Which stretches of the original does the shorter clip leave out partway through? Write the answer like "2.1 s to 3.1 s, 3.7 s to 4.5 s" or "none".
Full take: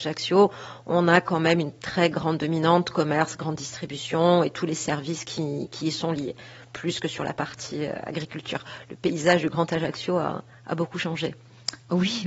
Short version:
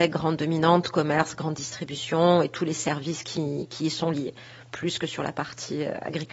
none